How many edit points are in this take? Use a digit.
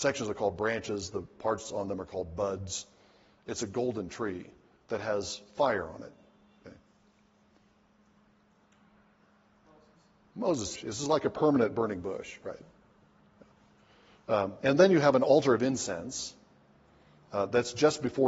1